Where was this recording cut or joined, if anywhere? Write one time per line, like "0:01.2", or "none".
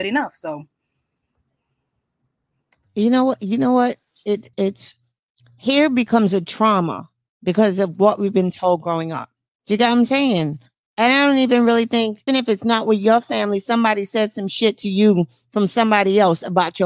0:04.5
0:12.3